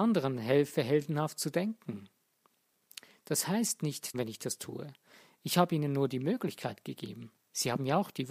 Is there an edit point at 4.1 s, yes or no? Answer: yes